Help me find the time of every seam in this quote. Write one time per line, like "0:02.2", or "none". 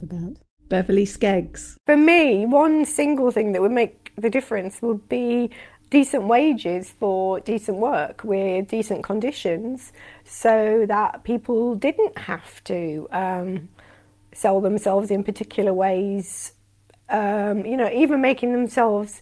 none